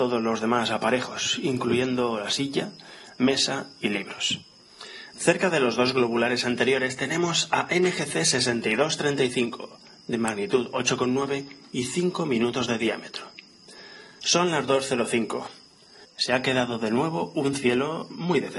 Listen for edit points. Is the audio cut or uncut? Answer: cut